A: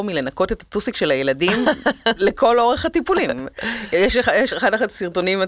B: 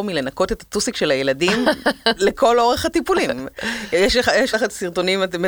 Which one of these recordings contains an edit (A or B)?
B